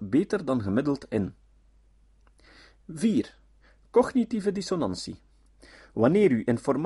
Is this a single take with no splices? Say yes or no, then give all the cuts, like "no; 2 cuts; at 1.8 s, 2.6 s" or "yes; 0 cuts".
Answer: yes; 0 cuts